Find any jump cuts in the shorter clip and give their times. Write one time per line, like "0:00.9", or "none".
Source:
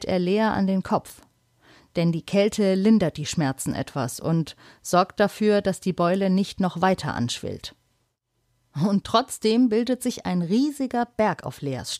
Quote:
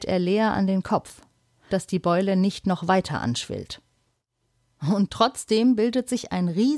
0:01.7